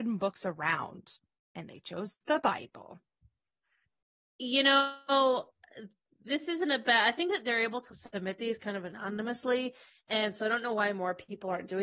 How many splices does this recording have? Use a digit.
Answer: 1